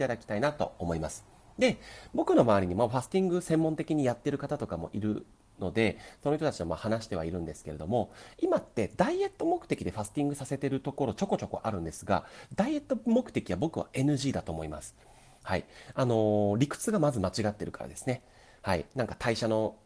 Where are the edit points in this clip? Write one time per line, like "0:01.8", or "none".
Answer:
none